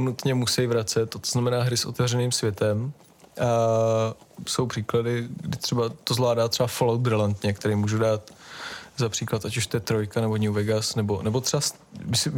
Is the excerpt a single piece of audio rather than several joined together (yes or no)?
yes